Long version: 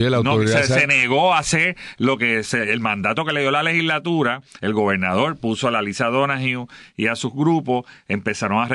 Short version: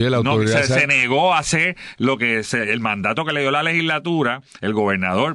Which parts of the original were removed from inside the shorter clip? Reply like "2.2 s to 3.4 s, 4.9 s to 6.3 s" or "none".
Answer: none